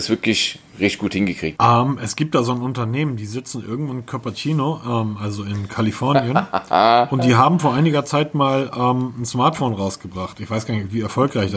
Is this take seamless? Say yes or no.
no